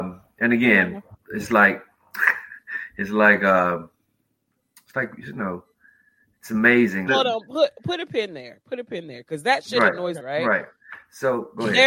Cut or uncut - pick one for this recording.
cut